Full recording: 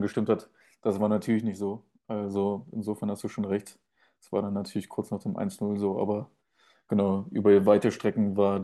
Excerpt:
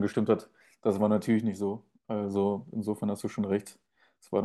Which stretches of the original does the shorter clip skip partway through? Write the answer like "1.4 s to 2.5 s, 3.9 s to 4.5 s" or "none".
none